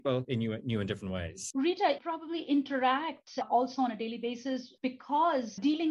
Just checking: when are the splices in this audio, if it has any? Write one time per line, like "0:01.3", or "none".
0:01.5